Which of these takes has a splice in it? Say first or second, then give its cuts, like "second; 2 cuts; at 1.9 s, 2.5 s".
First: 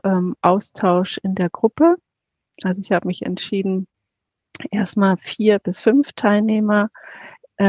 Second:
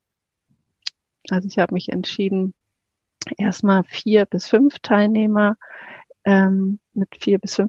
second; 1 cut; at 1.1 s